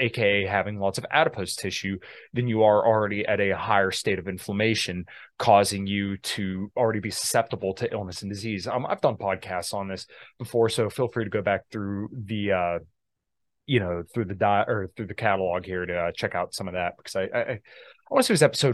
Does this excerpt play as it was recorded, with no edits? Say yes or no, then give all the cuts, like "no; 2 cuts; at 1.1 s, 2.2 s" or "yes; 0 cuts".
yes; 0 cuts